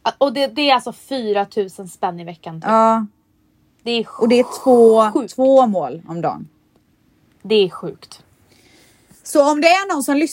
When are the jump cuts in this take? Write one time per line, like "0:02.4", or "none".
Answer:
none

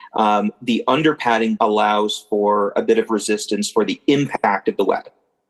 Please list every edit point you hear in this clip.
0:01.6

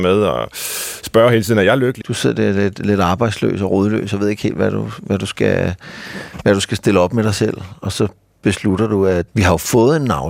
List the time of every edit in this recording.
0:02.0
0:09.3

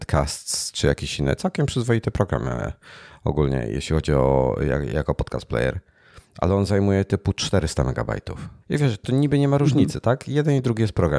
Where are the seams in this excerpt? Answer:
0:08.6

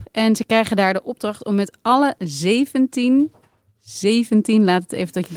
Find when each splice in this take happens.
none

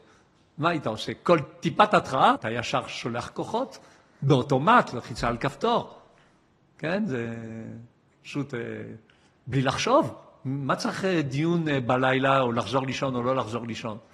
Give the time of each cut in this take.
0:02.4

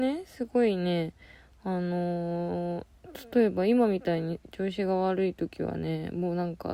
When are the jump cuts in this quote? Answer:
none

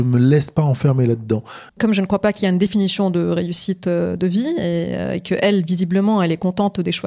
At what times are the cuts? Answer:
0:01.7

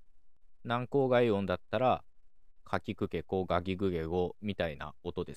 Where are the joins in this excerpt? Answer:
none

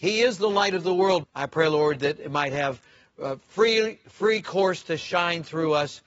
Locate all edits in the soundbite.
0:01.2

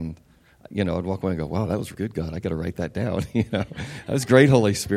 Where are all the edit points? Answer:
0:01.9

